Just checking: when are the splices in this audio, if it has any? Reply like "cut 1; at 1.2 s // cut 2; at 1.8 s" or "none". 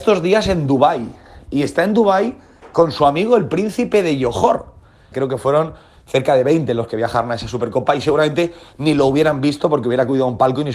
cut 1; at 5.1 s